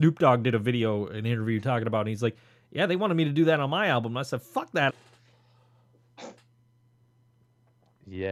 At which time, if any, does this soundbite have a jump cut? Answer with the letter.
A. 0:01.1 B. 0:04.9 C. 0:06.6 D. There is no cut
B